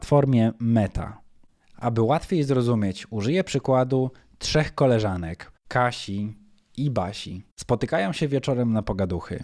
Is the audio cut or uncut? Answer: cut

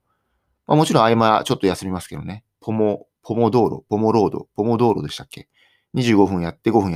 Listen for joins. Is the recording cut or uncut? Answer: uncut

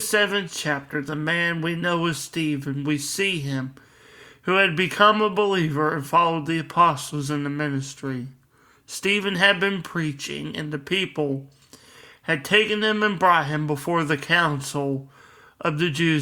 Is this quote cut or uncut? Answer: uncut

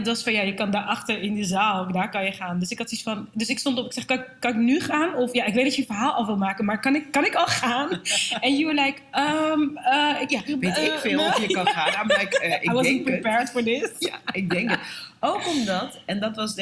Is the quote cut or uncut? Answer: uncut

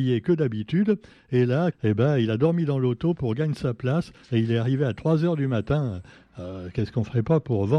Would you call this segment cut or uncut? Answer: cut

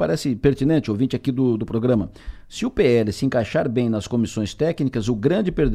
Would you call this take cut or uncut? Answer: uncut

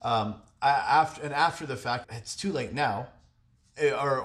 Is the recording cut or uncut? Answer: cut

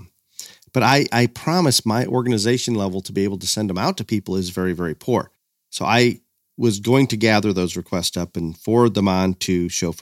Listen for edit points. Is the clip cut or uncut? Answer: uncut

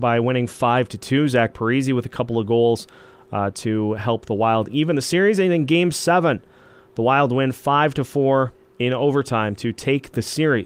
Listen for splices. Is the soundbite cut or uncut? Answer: uncut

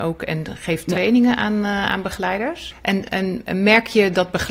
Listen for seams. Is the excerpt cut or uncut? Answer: cut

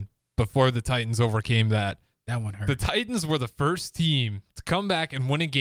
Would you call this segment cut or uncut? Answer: cut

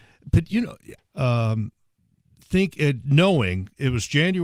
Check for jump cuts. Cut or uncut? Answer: cut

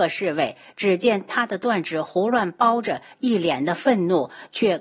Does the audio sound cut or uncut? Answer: uncut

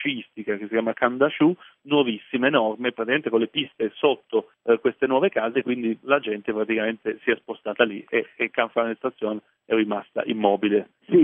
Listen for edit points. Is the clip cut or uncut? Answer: uncut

